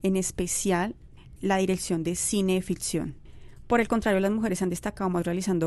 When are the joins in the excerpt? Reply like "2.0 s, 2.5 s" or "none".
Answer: 1.4 s